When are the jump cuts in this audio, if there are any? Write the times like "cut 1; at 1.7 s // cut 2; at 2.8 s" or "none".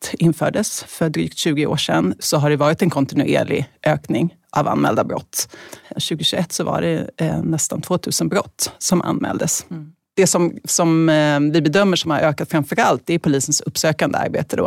cut 1; at 5.8 s